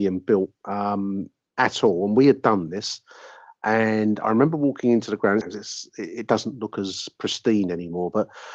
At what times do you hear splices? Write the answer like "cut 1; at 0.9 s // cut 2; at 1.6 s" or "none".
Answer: cut 1; at 5.4 s